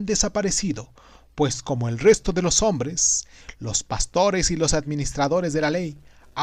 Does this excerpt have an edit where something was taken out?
no; 0 cuts

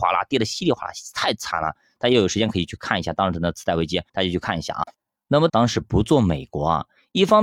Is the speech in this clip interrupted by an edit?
yes; 2 cuts; at 4.1 s, 5.5 s

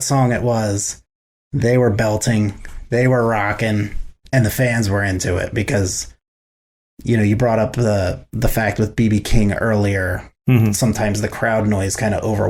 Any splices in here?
no; 0 cuts

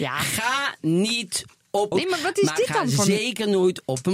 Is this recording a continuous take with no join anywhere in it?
no; 1 cut; at 1.9 s

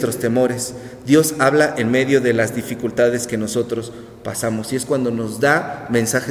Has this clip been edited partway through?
no; 0 cuts

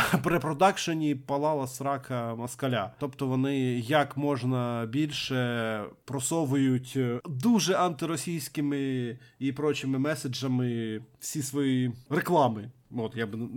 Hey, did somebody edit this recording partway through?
no; 0 cuts

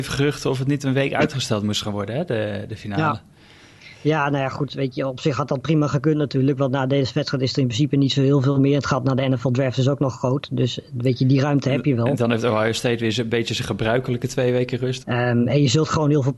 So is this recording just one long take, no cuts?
no; 1 cut; at 15.0 s

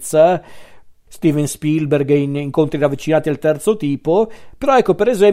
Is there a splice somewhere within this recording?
yes; 1 cut; at 1.1 s

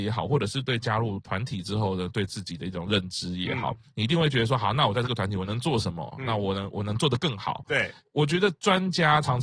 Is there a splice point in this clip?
no; 0 cuts

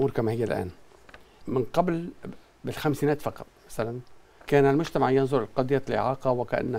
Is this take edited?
yes; 1 cut; at 1.4 s

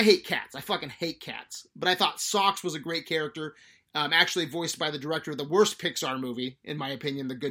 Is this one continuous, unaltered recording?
yes; 0 cuts

